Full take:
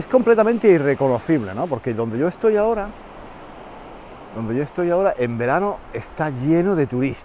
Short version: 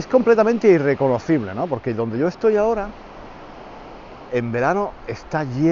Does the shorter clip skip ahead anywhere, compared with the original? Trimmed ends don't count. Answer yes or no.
yes